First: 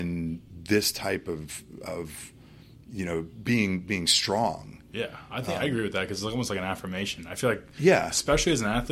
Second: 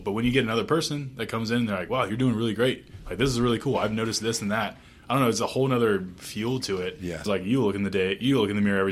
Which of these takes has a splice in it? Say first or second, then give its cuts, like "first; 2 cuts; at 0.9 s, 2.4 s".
second; 1 cut; at 7.3 s